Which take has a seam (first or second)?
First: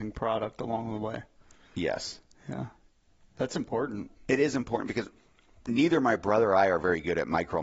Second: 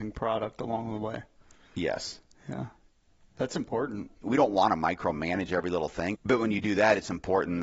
second